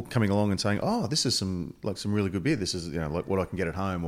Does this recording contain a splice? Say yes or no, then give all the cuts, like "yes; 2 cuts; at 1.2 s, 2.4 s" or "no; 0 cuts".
no; 0 cuts